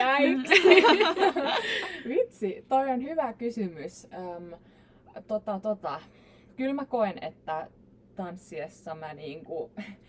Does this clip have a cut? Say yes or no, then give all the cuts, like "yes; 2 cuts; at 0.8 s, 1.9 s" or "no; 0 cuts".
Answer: no; 0 cuts